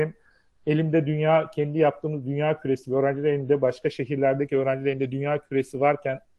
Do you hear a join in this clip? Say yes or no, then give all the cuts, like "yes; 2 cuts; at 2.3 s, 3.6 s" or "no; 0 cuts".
no; 0 cuts